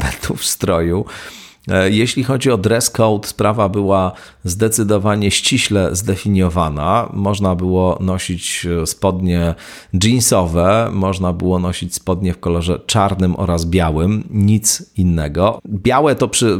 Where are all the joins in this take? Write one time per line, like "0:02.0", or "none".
0:15.6